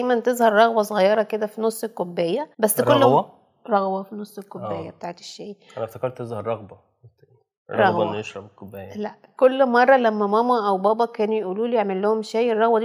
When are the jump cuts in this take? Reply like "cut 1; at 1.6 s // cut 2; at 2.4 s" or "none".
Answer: cut 1; at 2.5 s